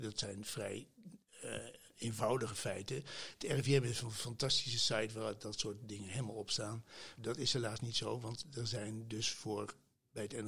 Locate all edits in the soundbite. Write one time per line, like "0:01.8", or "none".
0:07.2